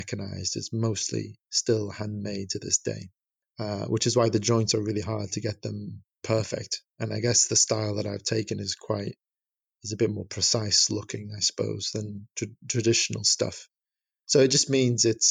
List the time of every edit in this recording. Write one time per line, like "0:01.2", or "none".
none